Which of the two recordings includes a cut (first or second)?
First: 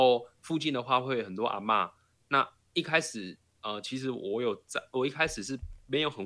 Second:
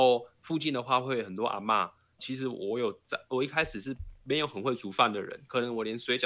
second